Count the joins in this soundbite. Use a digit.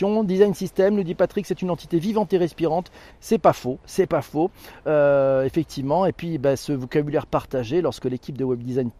1